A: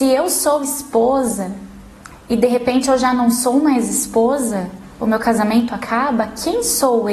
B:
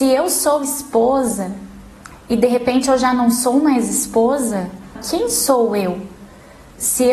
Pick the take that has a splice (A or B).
B